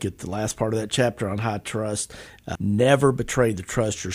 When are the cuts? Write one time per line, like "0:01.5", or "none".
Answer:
0:02.6